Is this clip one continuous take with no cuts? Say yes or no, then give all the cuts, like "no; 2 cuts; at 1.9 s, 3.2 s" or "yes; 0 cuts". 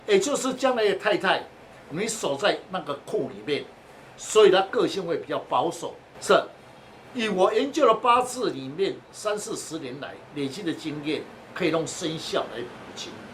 no; 1 cut; at 6.1 s